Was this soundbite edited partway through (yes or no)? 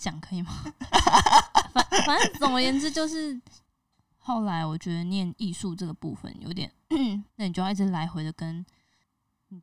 yes